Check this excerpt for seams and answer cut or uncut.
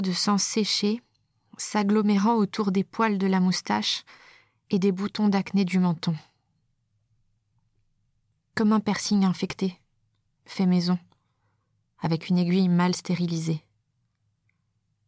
uncut